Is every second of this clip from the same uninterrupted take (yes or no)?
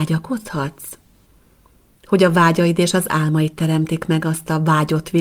yes